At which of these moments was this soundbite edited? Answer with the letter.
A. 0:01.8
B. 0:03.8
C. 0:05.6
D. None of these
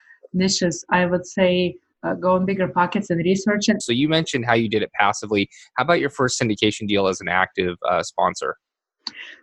B